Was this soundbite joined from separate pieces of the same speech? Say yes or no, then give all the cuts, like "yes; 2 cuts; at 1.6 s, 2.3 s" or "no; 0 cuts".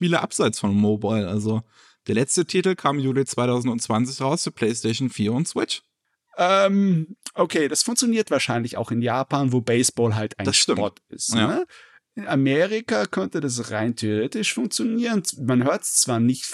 no; 0 cuts